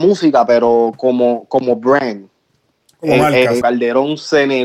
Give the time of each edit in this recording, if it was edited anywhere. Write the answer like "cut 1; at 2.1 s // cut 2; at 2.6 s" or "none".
cut 1; at 3.6 s